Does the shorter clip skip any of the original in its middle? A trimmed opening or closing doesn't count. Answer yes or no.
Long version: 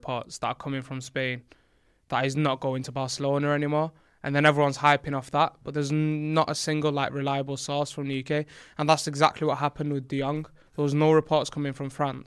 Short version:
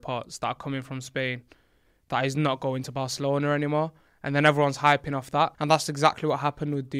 yes